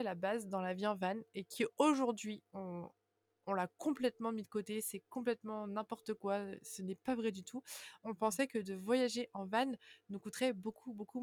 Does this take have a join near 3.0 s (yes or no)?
no